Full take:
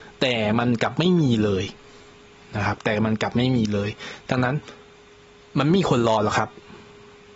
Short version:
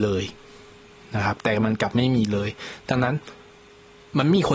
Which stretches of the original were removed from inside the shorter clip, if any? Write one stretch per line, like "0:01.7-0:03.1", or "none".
none